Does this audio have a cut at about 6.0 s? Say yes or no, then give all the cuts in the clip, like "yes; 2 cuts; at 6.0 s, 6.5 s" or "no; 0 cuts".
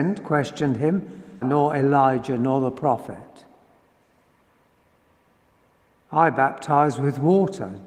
no; 1 cut; at 1.4 s